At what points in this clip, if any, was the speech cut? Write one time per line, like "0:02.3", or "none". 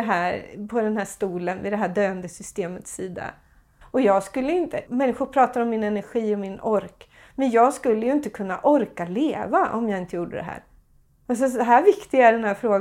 0:03.8
0:04.9